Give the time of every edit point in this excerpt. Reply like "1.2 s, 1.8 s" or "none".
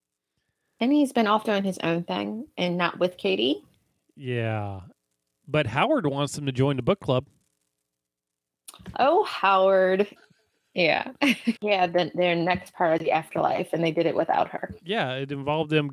10.2 s, 11.6 s